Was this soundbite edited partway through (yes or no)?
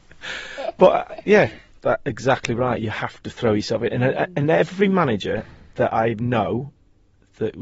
yes